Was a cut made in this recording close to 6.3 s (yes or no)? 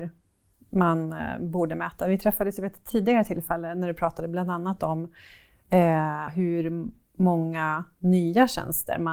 yes